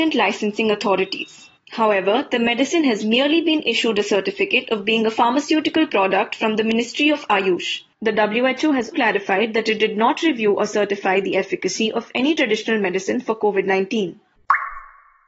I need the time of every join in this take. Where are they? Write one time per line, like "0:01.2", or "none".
0:08.9